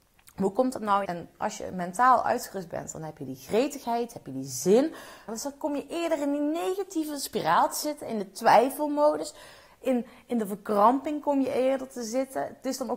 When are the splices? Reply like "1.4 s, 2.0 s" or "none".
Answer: 1.0 s, 5.3 s

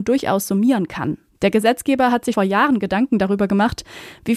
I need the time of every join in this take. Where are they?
1.3 s, 2.3 s

